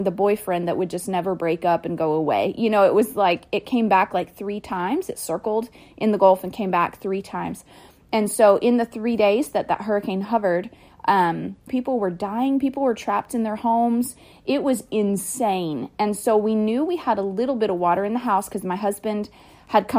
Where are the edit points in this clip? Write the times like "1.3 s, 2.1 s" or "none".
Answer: 11.7 s